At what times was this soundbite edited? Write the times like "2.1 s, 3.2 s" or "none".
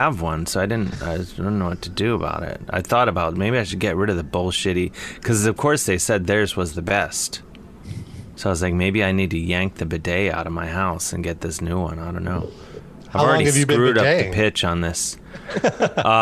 none